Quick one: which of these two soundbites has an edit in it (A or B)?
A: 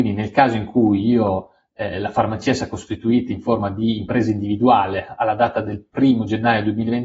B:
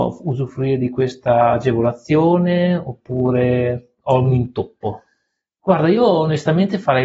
B